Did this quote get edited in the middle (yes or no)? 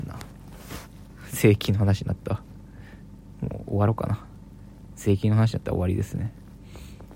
no